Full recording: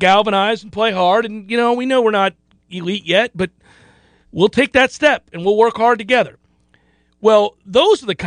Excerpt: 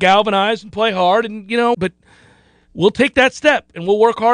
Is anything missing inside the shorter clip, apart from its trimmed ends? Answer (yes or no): yes